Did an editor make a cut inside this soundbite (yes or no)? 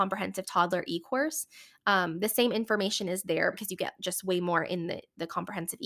yes